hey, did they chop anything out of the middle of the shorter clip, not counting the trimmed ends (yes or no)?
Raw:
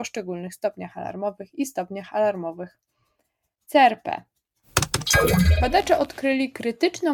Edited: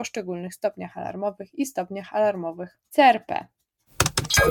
yes